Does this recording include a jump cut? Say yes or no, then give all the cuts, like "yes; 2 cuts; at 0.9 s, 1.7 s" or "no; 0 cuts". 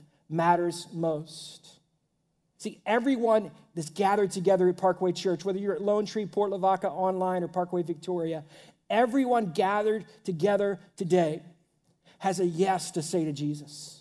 yes; 1 cut; at 2.6 s